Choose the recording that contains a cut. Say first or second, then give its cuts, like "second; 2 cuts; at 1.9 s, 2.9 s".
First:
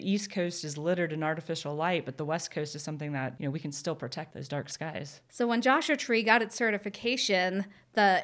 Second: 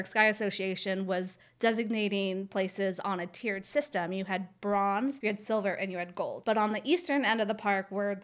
second; 1 cut; at 6.4 s